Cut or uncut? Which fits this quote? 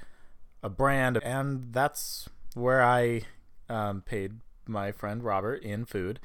cut